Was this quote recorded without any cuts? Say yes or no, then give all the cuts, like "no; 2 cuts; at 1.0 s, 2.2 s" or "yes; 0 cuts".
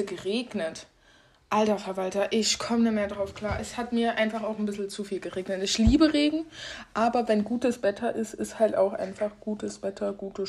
yes; 0 cuts